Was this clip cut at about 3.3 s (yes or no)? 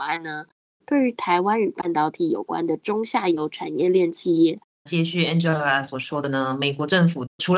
no